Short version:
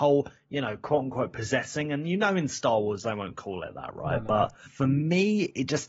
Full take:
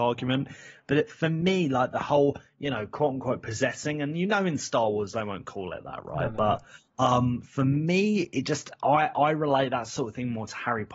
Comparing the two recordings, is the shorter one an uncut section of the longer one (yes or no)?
no